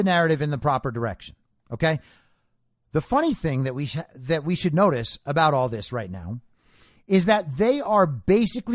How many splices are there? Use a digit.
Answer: 0